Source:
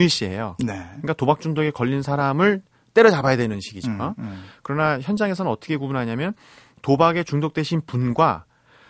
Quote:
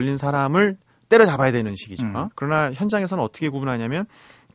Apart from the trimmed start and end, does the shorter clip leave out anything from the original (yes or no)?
yes